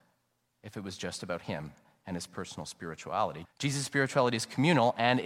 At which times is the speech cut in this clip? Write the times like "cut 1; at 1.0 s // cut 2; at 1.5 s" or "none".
cut 1; at 3.4 s